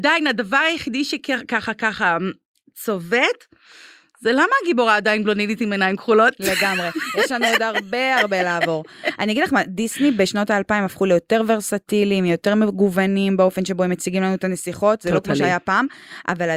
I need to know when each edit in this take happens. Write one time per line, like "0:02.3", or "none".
none